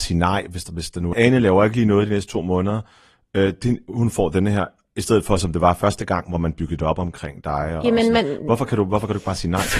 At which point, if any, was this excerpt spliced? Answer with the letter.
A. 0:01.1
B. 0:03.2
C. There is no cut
A